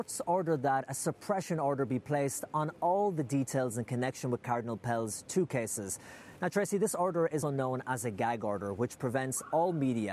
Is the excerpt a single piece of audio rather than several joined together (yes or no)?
no